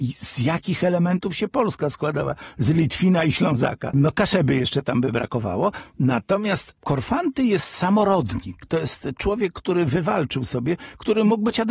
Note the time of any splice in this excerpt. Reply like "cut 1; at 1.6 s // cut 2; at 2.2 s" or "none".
cut 1; at 3.9 s